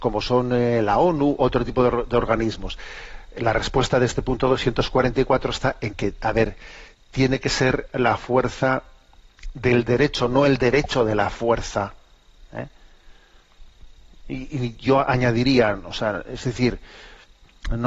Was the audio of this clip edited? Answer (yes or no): no